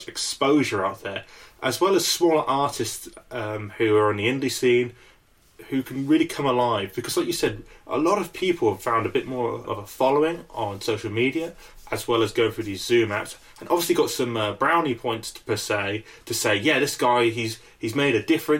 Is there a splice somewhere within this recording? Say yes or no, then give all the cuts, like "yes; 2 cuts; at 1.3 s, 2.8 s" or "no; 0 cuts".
yes; 1 cut; at 9.6 s